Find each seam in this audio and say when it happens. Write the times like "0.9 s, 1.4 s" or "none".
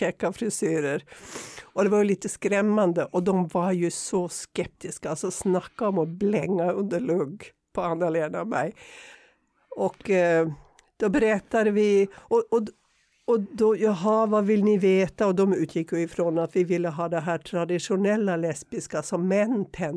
none